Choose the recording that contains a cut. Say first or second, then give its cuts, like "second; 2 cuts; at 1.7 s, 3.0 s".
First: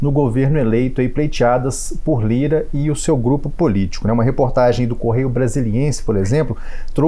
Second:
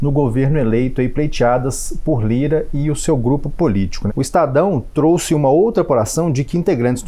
second; 1 cut; at 4.1 s